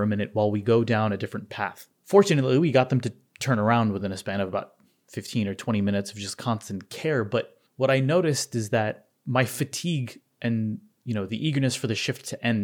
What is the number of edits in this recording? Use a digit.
1